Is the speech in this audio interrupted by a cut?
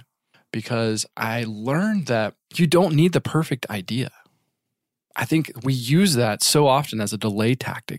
no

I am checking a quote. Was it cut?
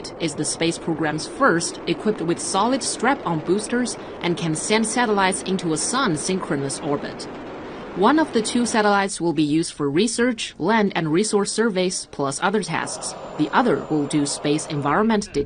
no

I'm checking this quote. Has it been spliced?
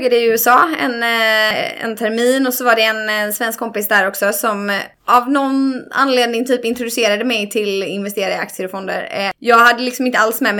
no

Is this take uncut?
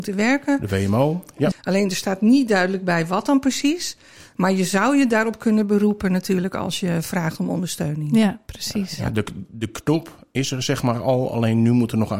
no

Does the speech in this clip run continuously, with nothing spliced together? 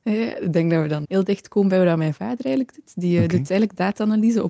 no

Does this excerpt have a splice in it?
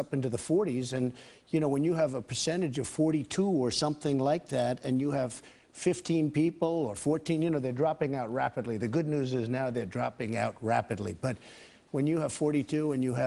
no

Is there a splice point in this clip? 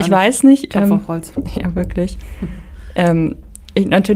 no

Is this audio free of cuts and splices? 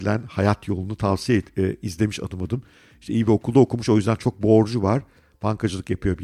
yes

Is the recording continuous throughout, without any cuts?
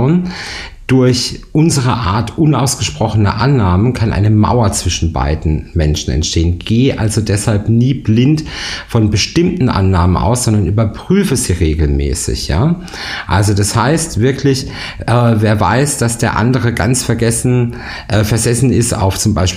yes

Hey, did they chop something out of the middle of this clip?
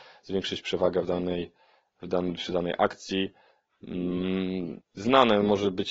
yes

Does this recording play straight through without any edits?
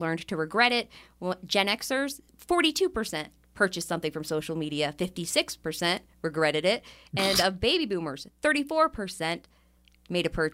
yes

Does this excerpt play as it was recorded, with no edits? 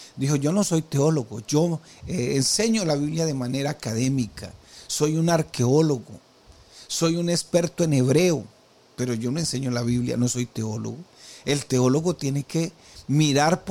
yes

